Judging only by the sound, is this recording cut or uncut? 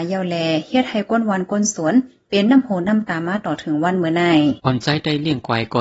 cut